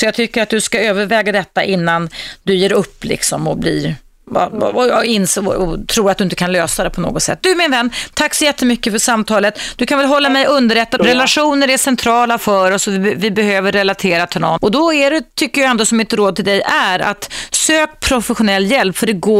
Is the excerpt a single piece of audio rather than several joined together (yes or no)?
no